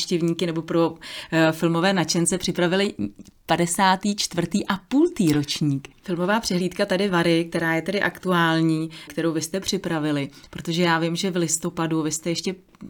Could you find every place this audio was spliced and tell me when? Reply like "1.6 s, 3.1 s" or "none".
5.9 s, 9.1 s